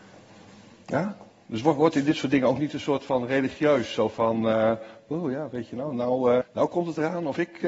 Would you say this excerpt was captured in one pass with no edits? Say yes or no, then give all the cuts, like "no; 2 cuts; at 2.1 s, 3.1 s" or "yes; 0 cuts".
no; 1 cut; at 6.4 s